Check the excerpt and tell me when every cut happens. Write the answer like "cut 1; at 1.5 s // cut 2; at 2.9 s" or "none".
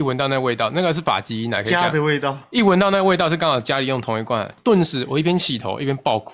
none